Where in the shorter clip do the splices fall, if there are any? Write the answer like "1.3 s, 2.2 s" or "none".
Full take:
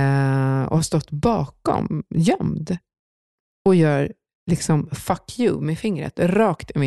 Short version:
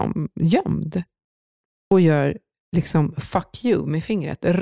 none